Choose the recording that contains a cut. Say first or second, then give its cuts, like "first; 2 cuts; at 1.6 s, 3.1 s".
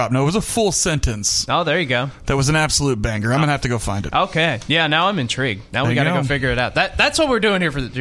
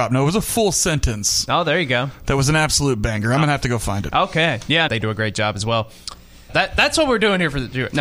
second; 2 cuts; at 4.9 s, 6.5 s